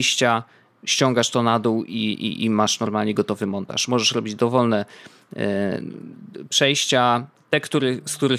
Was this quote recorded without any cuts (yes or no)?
yes